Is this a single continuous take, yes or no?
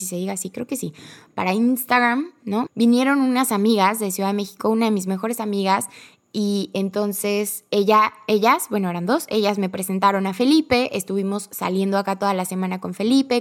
no